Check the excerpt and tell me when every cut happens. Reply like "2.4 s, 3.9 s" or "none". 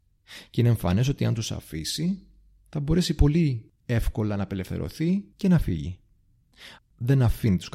5.3 s, 6.8 s